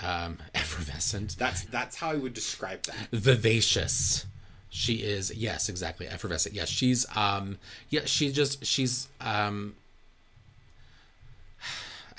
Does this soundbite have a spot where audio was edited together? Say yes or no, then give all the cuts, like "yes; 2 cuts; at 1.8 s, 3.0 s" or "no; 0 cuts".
yes; 1 cut; at 1.7 s